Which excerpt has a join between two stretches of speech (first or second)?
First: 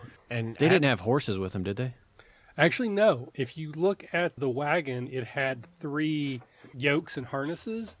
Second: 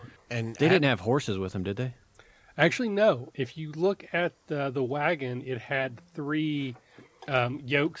first